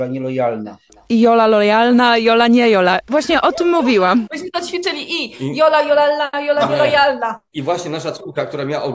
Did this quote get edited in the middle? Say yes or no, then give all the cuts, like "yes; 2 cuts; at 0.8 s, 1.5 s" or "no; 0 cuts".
no; 0 cuts